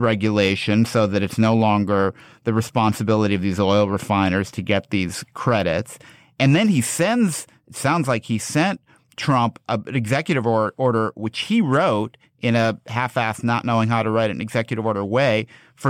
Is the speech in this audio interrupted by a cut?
no; 0 cuts

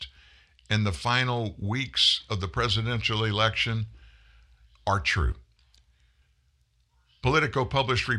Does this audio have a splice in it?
no; 0 cuts

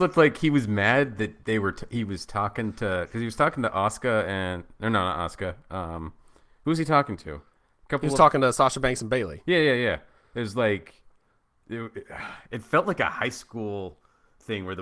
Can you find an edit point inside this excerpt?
no; 0 cuts

